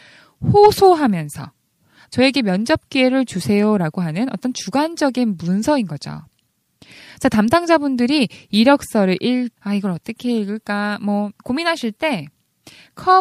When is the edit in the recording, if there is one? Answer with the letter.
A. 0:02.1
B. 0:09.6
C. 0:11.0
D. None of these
B